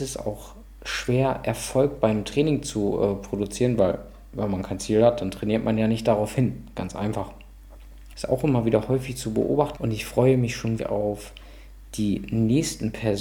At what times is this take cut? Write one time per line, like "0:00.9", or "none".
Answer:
0:08.1
0:09.8
0:10.8

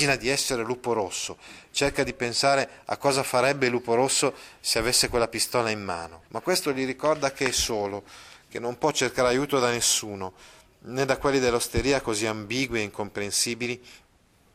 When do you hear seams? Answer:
0:06.3

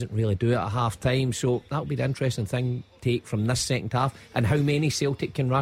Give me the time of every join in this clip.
none

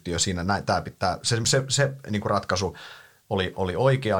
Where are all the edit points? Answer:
0:01.4

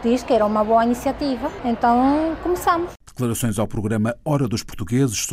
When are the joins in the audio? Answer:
none

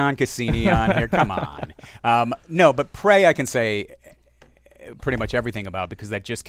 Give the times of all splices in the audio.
none

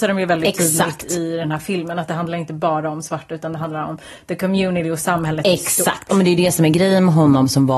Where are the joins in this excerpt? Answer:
none

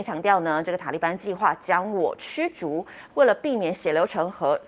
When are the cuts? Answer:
0:03.1

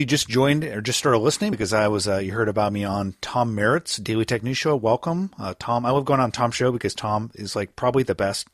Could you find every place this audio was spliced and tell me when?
none

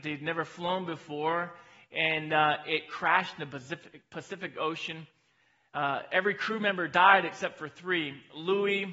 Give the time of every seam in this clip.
none

